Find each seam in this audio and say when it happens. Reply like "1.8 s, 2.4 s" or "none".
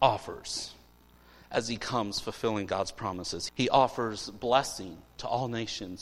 3.5 s